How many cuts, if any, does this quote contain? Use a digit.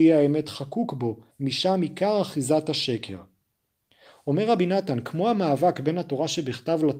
1